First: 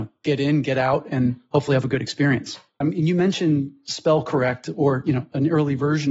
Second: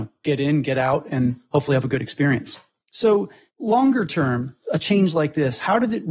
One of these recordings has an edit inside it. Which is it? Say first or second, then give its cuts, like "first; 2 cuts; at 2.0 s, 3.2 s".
first; 1 cut; at 2.8 s